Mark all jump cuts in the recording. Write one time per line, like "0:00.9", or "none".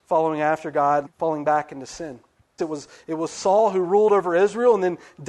0:01.1
0:02.6